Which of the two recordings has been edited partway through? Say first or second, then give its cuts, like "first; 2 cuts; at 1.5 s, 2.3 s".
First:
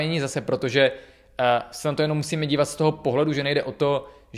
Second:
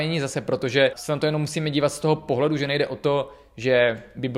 second; 1 cut; at 0.9 s